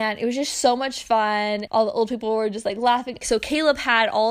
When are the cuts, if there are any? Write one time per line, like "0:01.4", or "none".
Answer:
0:01.7
0:03.2

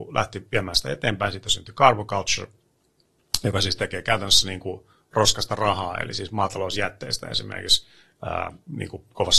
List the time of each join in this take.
none

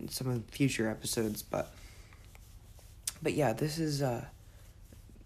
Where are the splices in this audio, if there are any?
none

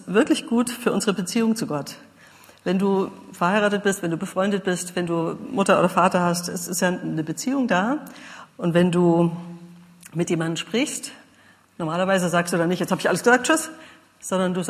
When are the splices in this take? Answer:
0:08.5

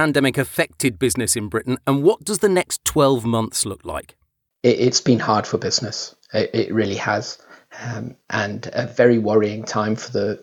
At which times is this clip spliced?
none

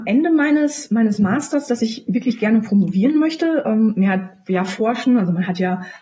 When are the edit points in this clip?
none

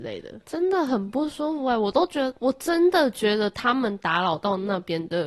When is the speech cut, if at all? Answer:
0:02.4

